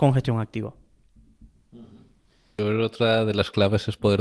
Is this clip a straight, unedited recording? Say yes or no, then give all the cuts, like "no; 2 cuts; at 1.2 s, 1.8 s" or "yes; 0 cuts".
yes; 0 cuts